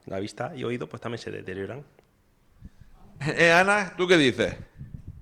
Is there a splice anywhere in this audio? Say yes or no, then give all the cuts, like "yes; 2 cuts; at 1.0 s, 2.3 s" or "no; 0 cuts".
yes; 1 cut; at 3.2 s